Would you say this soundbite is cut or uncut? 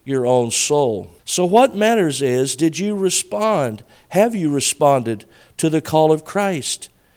cut